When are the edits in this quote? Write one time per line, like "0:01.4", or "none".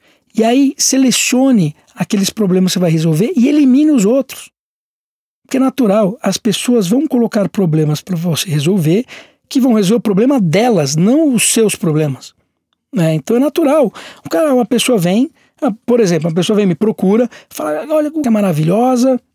0:18.2